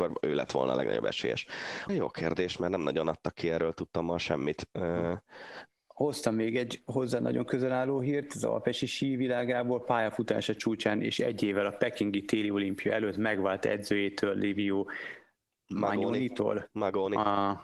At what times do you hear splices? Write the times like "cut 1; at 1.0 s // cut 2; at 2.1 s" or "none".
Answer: cut 1; at 1.9 s // cut 2; at 5.7 s